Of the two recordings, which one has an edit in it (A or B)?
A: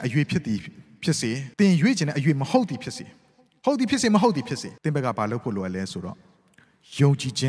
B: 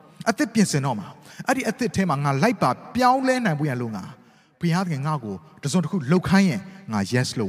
A